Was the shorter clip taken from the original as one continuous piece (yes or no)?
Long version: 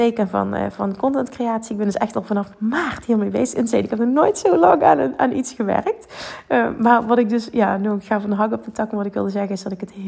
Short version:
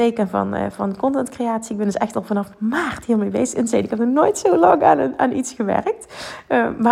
yes